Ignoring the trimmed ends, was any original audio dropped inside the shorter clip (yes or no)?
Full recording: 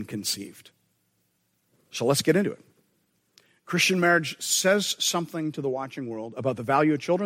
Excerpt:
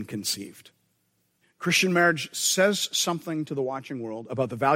yes